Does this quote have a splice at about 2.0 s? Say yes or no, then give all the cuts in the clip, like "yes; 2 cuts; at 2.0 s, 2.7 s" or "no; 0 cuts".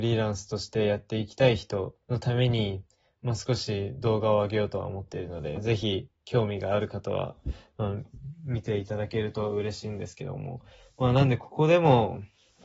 yes; 1 cut; at 2.0 s